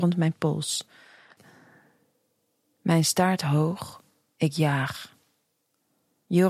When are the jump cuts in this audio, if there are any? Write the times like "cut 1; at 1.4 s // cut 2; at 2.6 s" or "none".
cut 1; at 1.4 s